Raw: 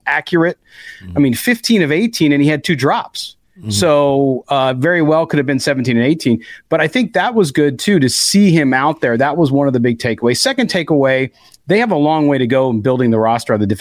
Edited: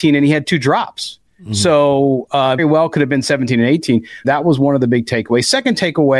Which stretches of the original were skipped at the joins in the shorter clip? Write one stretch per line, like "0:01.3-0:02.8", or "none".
0:04.8-0:05.0
0:06.6-0:09.2